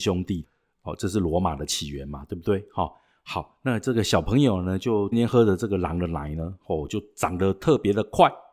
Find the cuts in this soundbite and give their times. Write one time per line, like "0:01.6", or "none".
0:05.1